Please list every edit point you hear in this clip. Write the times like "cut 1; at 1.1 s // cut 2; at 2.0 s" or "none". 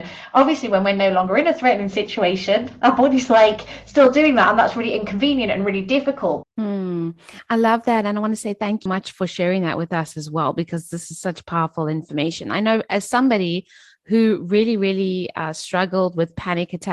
cut 1; at 6.4 s // cut 2; at 8.9 s